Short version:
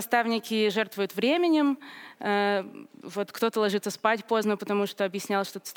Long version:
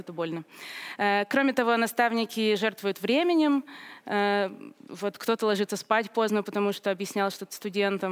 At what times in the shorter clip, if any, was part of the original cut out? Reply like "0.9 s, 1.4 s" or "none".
none